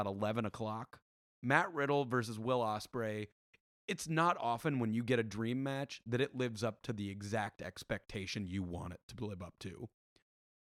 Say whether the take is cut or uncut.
uncut